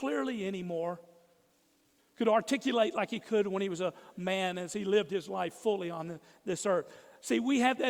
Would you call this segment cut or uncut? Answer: cut